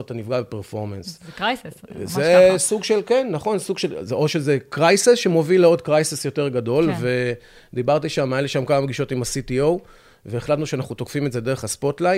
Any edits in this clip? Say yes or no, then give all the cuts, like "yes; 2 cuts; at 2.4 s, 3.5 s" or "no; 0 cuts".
no; 0 cuts